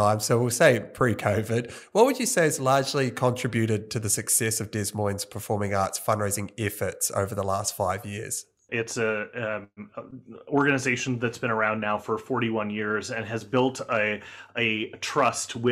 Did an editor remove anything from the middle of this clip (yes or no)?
yes